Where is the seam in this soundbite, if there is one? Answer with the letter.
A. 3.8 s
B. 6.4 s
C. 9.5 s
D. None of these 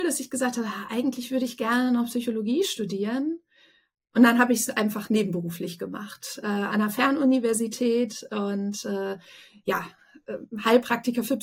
D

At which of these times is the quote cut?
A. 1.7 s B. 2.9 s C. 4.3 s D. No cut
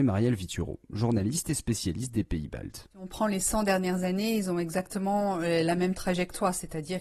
B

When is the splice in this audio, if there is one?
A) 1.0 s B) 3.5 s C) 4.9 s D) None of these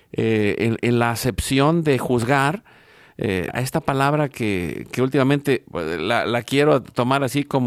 B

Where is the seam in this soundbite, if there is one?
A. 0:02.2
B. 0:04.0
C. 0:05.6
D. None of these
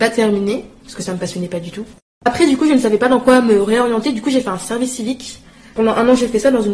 A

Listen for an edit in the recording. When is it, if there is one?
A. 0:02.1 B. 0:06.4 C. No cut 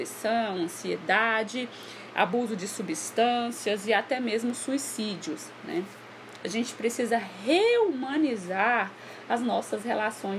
B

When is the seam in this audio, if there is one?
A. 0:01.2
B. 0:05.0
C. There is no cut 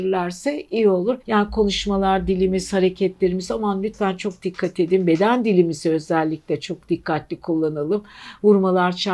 A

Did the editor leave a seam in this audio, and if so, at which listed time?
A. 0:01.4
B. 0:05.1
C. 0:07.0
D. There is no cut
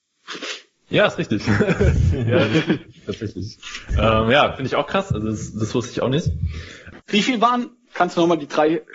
C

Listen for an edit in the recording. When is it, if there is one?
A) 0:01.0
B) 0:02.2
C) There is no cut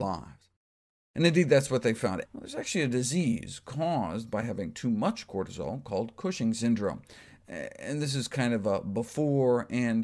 B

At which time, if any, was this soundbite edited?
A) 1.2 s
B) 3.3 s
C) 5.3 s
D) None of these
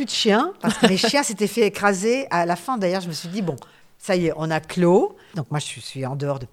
C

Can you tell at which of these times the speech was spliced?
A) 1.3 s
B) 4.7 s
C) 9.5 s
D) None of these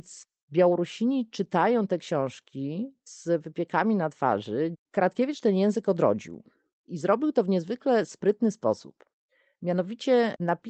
B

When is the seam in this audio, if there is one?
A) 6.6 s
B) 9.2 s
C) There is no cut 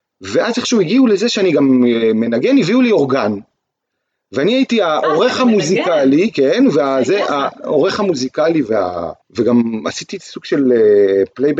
B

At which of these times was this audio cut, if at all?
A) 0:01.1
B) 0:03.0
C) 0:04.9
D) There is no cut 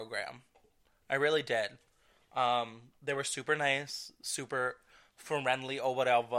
D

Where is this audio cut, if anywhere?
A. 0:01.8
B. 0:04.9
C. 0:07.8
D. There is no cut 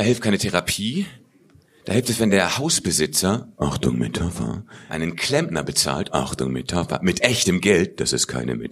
B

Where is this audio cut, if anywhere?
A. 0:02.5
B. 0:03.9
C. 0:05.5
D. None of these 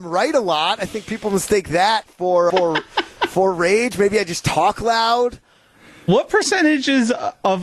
A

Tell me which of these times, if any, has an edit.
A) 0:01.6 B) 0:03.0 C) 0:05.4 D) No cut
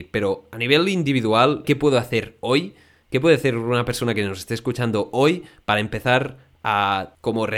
A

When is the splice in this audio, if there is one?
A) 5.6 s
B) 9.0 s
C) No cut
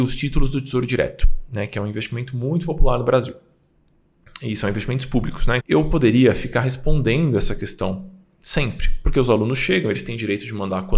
A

